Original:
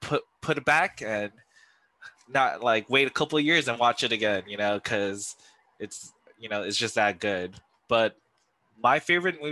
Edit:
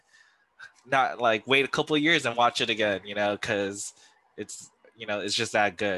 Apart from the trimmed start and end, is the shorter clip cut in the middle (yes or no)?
no